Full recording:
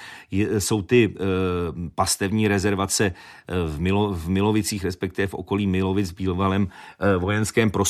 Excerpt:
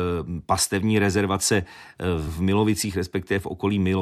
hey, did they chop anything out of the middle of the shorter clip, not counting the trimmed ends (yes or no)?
yes